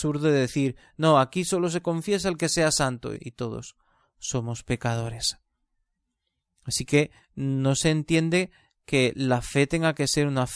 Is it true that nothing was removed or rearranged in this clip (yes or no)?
no